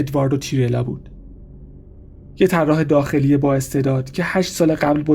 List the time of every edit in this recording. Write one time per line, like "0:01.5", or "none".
none